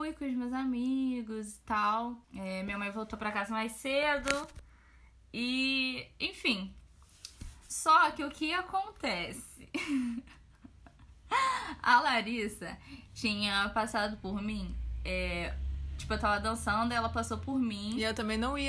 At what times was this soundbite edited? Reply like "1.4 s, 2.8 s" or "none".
2.2 s